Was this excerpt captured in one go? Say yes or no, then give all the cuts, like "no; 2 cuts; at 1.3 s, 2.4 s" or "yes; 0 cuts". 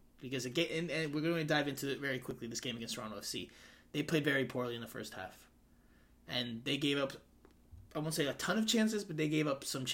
yes; 0 cuts